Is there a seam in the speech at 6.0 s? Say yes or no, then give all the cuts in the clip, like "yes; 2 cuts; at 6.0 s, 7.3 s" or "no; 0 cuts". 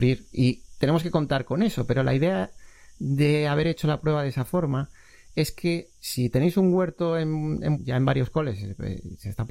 yes; 2 cuts; at 6.0 s, 7.8 s